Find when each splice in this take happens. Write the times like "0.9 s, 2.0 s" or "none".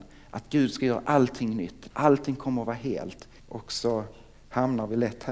1.9 s, 3.4 s